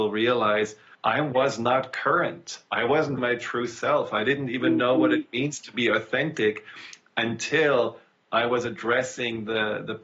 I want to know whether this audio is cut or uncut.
cut